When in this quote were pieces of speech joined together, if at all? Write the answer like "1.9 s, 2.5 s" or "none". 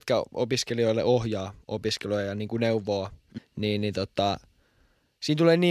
3.4 s